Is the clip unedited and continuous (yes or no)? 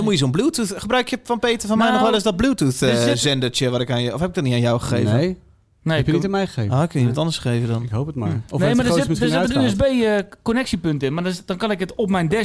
yes